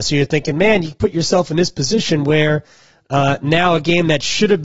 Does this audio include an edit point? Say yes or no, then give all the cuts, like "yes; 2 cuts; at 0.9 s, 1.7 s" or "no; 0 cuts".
no; 0 cuts